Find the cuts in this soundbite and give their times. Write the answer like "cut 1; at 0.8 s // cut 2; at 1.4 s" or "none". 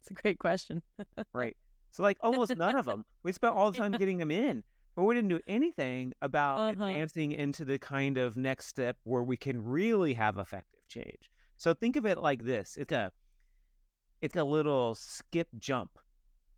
cut 1; at 12.9 s // cut 2; at 14.3 s